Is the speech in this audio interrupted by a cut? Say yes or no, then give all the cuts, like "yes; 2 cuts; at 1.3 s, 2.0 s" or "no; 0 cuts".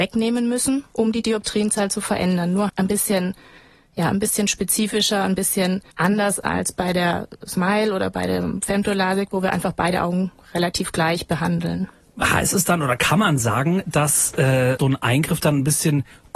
yes; 3 cuts; at 2.7 s, 5.9 s, 14.8 s